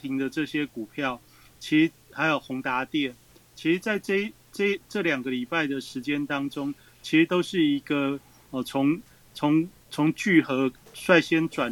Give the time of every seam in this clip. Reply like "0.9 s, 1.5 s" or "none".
8.5 s, 9.8 s